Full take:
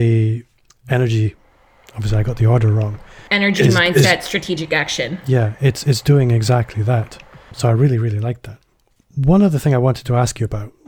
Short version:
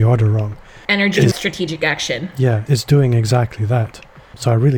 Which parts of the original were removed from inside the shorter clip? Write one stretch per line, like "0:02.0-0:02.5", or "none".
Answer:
0:03.7-0:04.2
0:05.6-0:05.8